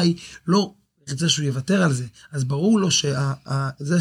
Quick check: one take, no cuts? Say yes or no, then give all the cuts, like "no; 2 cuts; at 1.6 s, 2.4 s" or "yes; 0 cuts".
yes; 0 cuts